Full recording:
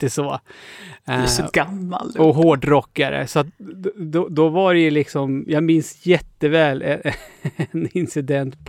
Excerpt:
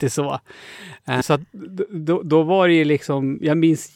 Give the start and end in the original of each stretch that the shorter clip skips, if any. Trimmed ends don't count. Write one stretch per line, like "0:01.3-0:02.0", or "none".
0:01.2-0:03.3